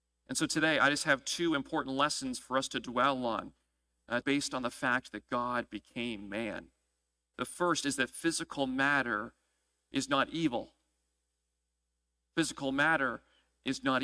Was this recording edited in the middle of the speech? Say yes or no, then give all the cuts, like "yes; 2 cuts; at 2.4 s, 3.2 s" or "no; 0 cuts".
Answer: yes; 2 cuts; at 4.2 s, 7.3 s